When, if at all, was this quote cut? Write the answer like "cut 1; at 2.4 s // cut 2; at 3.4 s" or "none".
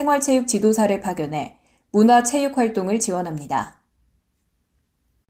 none